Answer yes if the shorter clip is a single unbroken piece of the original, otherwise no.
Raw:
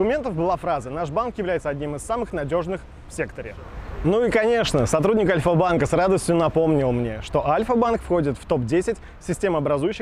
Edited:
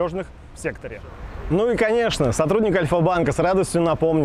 yes